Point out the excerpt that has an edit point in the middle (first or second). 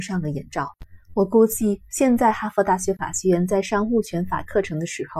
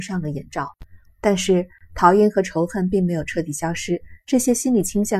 second